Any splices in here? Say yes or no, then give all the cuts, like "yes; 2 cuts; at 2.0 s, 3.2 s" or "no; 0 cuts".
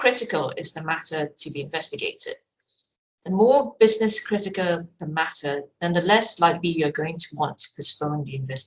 no; 0 cuts